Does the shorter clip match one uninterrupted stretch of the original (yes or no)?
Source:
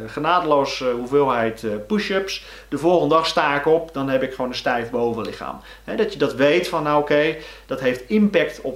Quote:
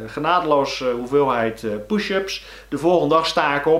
yes